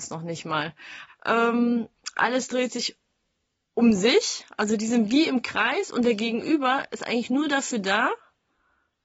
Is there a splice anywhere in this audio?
yes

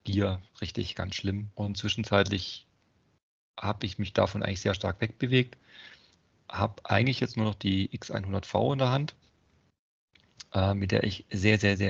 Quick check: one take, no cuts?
no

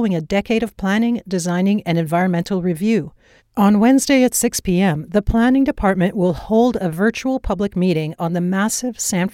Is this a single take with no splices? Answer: no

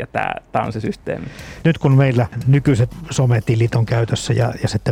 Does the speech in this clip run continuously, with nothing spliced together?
no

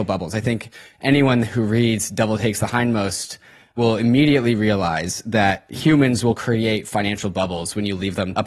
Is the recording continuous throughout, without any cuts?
yes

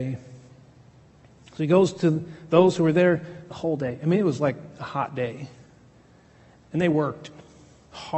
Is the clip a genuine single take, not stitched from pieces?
yes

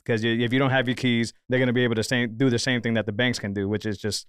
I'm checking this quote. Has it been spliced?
yes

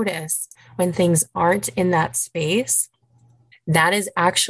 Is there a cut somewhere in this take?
yes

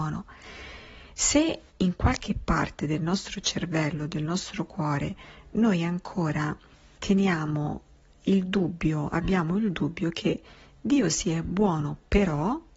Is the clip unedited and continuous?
yes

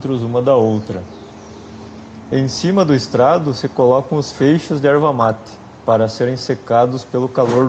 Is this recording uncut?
yes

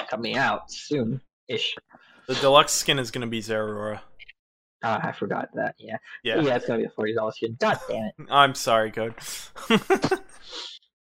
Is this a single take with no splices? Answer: yes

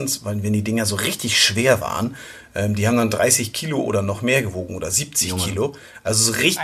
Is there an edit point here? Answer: no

